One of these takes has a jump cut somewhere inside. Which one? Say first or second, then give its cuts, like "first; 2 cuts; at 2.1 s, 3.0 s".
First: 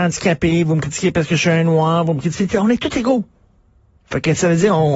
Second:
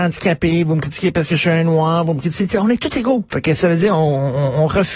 second; 1 cut; at 3.3 s